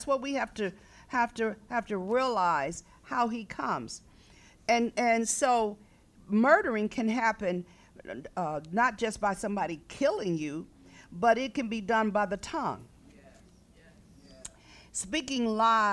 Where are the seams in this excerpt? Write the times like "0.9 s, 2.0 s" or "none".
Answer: none

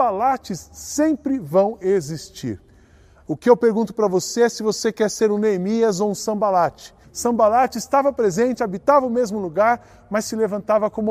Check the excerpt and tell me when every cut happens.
7.0 s

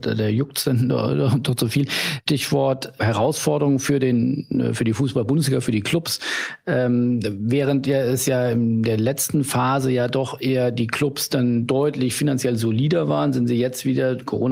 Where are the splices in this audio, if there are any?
none

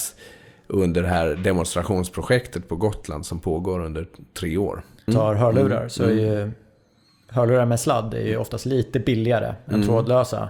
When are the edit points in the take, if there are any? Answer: 5.1 s

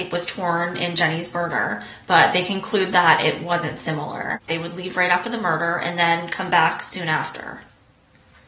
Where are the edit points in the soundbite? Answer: 4.5 s

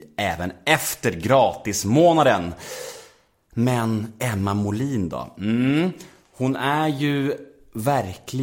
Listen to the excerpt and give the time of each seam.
none

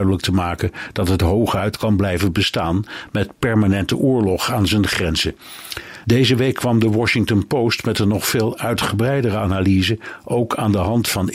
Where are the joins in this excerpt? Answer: 6.0 s

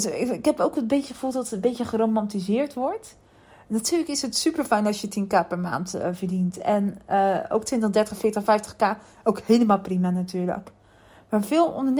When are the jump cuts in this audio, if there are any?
none

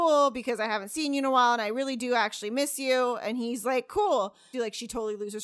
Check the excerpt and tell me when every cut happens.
4.5 s

